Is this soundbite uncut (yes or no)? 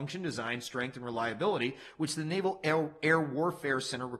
yes